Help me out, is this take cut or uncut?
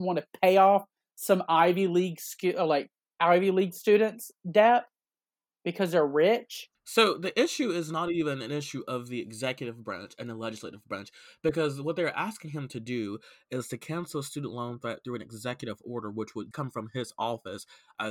cut